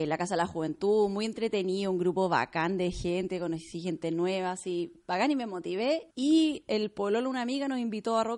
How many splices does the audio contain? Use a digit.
1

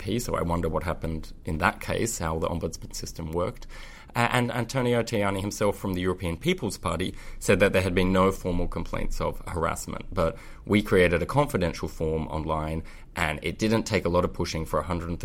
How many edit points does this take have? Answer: 0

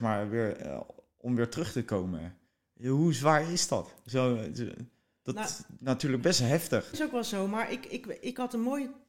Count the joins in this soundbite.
1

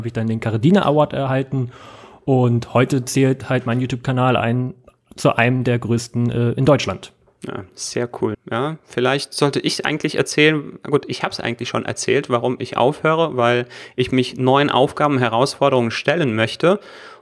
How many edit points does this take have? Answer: 1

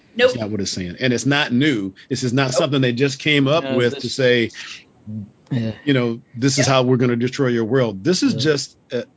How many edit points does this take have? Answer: 0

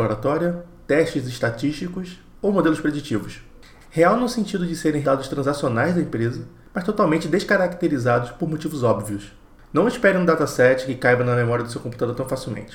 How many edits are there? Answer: 1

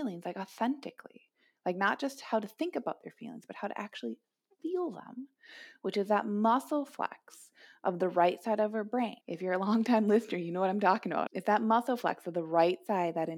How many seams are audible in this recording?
2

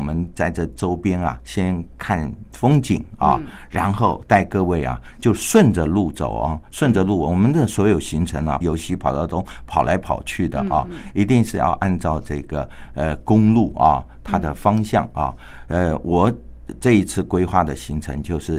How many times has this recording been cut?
1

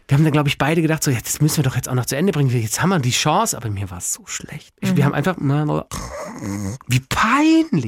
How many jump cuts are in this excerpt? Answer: 1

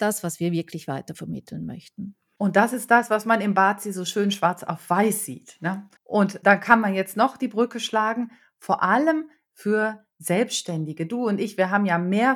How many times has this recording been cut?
1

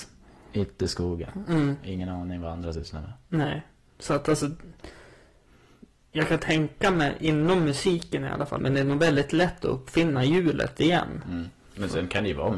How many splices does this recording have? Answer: 1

